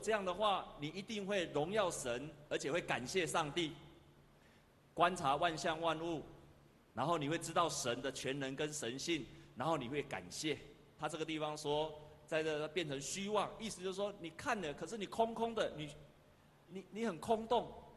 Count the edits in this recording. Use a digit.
2